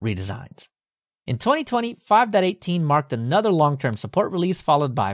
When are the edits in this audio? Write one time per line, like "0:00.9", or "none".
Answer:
none